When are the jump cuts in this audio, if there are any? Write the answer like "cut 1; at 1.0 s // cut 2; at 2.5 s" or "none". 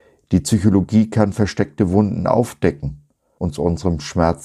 cut 1; at 3.4 s